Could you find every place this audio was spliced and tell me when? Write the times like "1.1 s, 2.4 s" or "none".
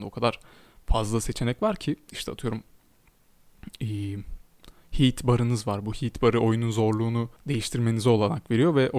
7.4 s

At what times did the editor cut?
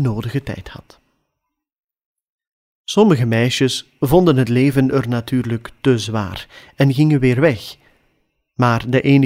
none

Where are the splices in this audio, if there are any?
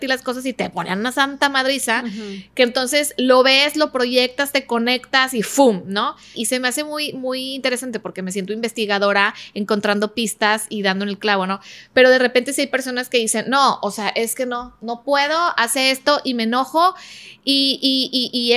6.3 s

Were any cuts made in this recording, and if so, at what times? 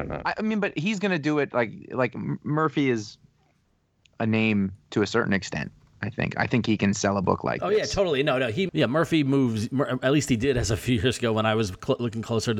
8.7 s

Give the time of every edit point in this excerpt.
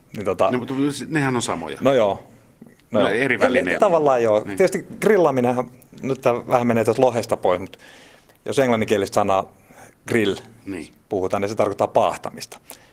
3.8 s

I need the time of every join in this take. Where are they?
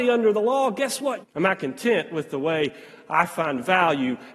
1.2 s

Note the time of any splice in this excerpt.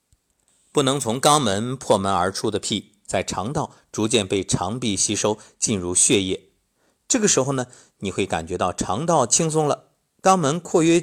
none

